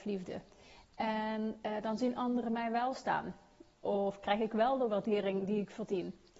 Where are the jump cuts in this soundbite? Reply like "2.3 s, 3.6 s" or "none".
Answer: none